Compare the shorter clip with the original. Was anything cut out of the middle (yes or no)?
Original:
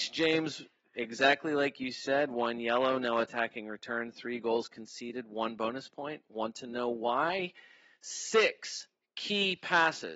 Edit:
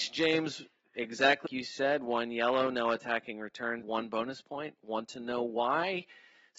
yes